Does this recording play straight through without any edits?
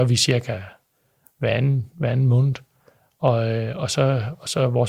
yes; 0 cuts

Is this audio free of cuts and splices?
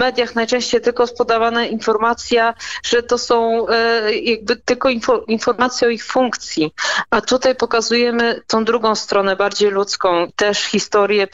no; 1 cut; at 10.3 s

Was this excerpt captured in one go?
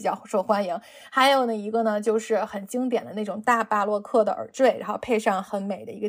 yes; 0 cuts

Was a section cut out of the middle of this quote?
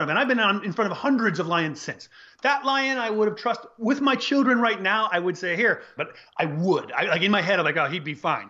yes; 1 cut; at 6.0 s

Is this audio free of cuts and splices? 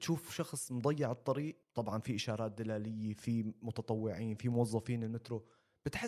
no; 1 cut; at 1.6 s

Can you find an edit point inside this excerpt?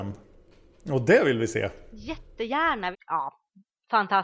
yes; 1 cut; at 2.9 s

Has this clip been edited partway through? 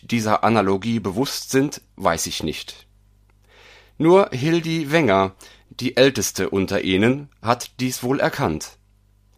no; 0 cuts

